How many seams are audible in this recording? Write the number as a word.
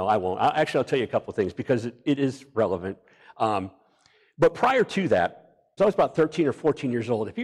one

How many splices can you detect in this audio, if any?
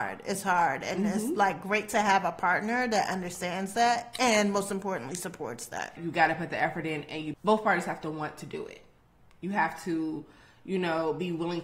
two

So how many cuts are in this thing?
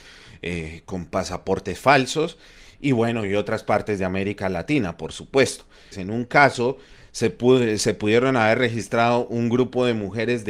one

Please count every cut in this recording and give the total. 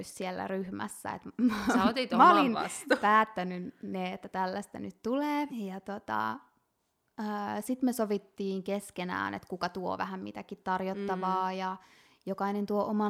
one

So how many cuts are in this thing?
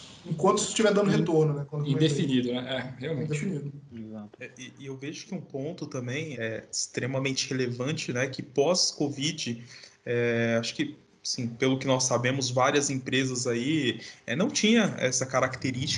one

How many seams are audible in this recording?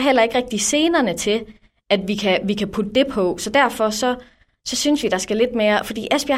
zero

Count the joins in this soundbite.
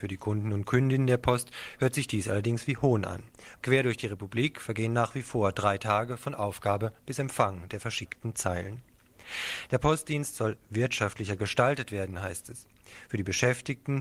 two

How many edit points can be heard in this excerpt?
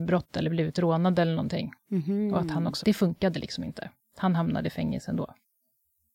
one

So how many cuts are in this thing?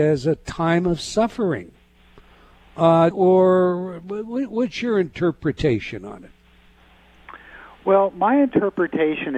one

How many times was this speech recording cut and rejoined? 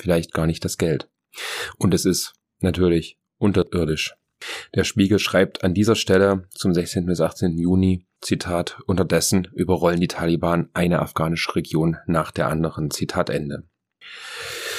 one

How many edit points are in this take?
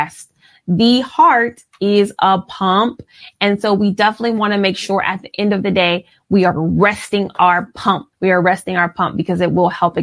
one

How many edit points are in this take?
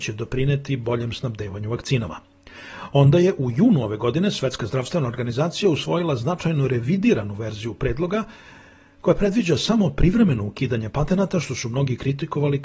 zero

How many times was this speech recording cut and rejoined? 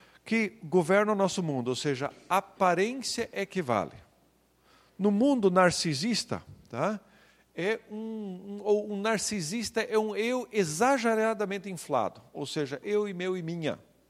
one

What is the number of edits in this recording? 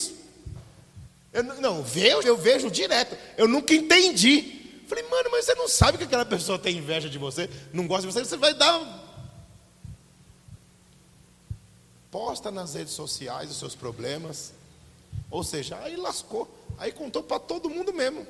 one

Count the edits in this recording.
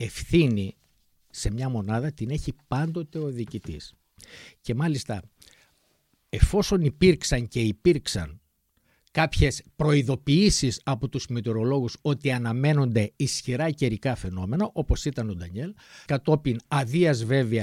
one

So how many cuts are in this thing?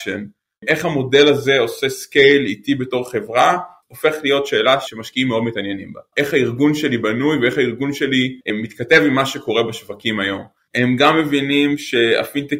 three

